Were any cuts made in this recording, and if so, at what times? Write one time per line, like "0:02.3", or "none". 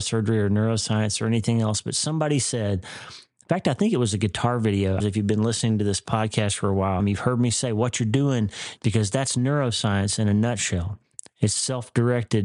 0:05.0
0:07.0
0:08.8